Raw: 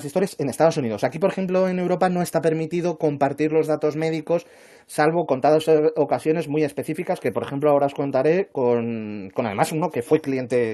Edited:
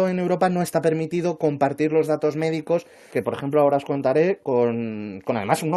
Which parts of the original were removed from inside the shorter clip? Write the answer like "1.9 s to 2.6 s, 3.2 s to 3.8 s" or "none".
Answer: 4.7 s to 7.2 s